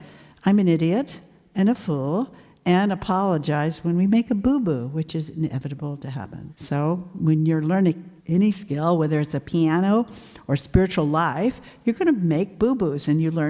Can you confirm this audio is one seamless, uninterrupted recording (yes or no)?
no